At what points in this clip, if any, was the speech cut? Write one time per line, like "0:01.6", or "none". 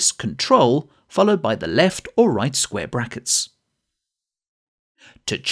none